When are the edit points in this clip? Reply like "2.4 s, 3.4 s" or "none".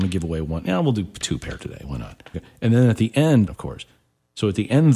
2.3 s, 3.5 s